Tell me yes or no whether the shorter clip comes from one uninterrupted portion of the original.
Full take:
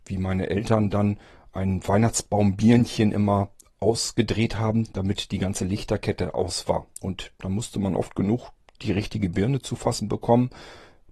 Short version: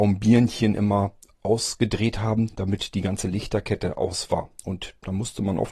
yes